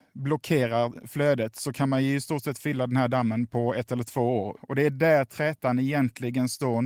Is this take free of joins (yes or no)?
no